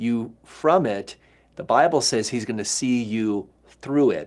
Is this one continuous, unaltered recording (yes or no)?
yes